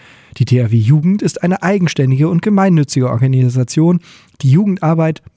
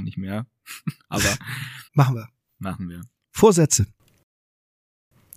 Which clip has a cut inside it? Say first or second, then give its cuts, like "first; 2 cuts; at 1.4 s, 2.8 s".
second; 1 cut; at 1.9 s